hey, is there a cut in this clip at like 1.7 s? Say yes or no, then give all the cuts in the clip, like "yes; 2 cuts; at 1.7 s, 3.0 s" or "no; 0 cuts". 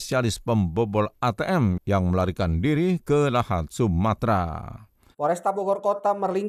no; 1 cut; at 5.1 s